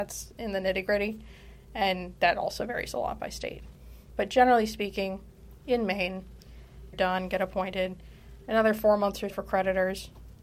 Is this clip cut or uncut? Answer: cut